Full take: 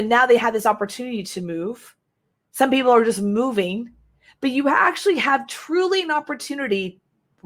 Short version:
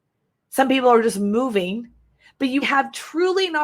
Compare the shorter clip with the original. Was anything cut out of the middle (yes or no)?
yes